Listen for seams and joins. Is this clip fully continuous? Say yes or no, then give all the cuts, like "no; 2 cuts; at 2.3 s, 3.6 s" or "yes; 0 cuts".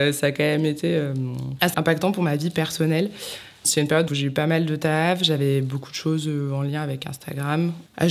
no; 2 cuts; at 1.7 s, 4.1 s